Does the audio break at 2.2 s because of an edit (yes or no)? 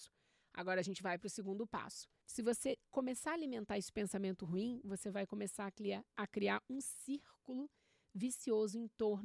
yes